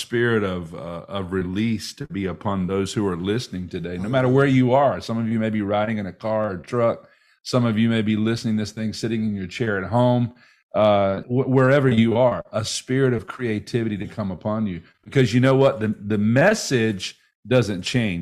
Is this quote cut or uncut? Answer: cut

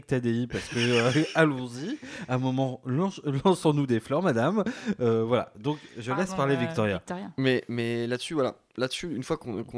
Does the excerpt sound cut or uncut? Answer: uncut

